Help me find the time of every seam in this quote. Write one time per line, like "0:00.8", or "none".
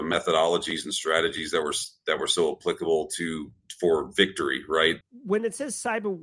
0:05.0